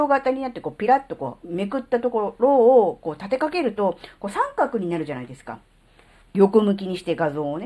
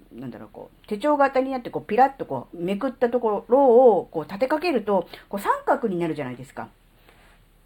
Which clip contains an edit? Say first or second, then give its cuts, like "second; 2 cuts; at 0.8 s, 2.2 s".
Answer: first; 1 cut; at 6.2 s